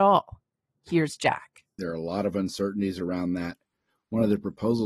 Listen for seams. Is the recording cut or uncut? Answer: cut